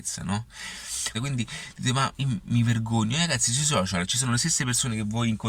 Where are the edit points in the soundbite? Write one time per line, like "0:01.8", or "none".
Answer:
0:01.1